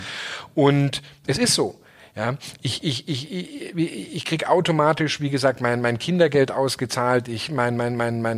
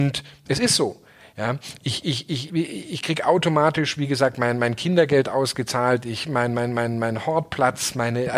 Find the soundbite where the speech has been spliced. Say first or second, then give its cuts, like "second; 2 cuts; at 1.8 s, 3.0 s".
second; 1 cut; at 2.5 s